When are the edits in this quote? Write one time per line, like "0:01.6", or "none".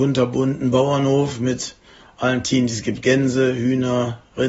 none